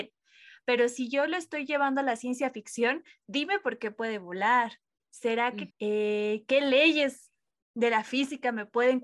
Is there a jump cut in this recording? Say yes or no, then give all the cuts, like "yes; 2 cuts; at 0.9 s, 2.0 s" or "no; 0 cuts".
yes; 1 cut; at 5.7 s